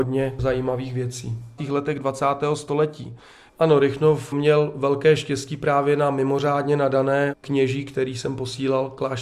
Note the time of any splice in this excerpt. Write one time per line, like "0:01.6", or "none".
0:01.6
0:03.5